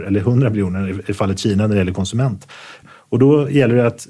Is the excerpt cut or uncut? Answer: cut